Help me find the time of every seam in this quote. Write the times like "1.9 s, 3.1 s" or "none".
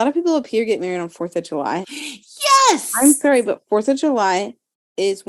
1.8 s